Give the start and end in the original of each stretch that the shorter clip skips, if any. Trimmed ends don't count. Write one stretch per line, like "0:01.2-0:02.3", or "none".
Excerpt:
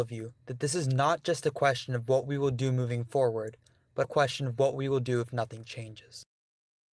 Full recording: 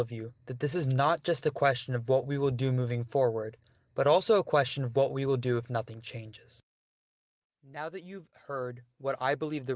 0:04.0-0:04.4